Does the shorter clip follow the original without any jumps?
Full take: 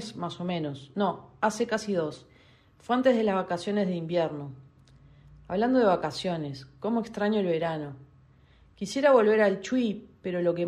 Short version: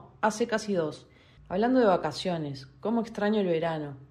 no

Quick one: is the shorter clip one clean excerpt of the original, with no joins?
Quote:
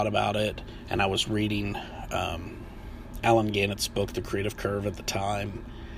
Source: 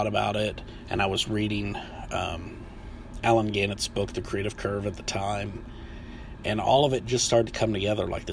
yes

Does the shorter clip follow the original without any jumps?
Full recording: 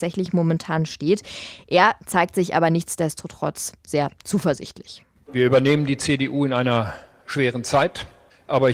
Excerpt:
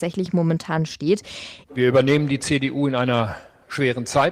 no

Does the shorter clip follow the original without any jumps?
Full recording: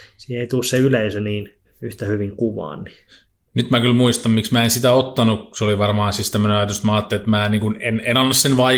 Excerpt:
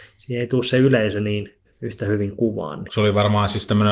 no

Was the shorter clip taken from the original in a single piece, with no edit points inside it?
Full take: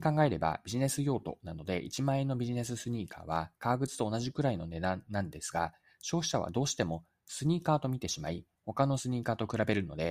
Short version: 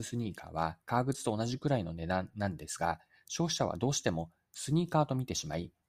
yes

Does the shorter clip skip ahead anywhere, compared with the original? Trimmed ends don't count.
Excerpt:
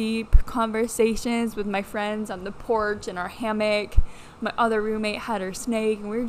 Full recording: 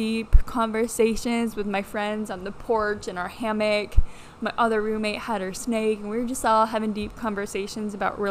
no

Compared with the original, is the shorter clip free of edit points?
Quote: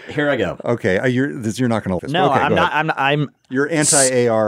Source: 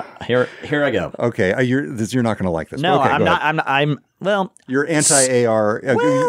no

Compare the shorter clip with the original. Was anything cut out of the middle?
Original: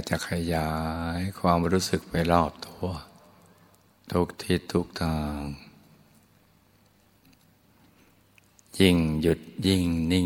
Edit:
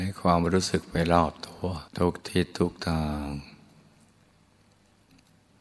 yes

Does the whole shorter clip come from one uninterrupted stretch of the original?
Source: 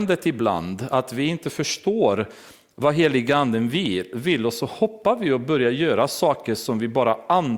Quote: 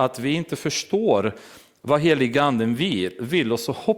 yes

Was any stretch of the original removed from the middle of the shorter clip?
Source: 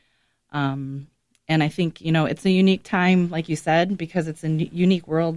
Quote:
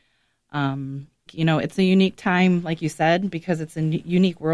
yes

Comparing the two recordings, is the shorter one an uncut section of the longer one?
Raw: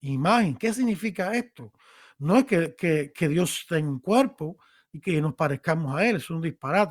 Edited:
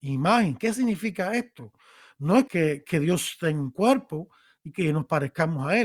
no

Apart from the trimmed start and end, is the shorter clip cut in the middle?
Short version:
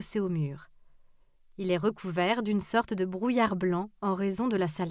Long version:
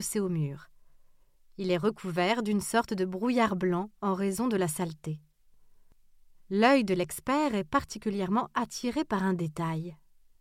no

